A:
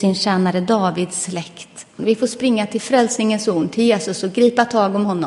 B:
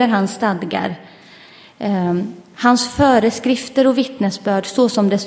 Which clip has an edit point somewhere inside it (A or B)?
A